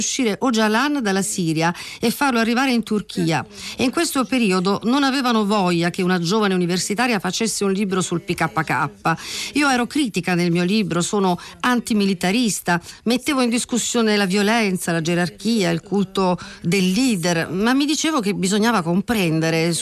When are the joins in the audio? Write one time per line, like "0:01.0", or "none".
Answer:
none